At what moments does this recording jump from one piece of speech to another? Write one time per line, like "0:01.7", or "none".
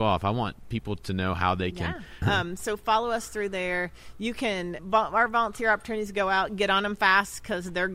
0:02.2
0:04.8

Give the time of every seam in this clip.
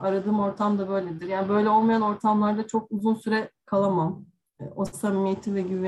none

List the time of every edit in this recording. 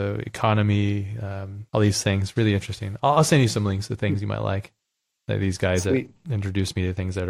0:01.7

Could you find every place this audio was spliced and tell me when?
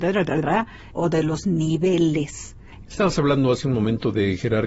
0:00.9
0:02.9

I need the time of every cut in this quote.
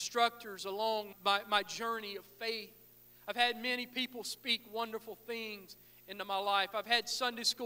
0:01.1

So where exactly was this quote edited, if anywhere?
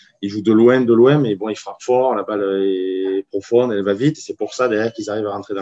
none

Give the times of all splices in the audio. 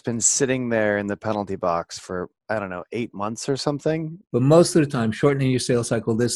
0:04.2

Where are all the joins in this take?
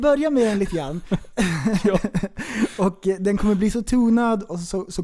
none

